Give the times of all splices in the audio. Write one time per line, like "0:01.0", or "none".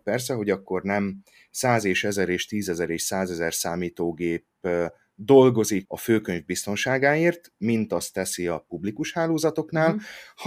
0:05.9